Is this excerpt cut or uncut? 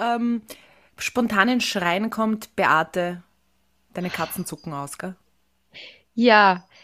uncut